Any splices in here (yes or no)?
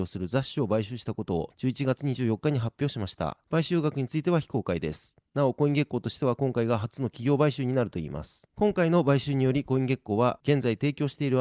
no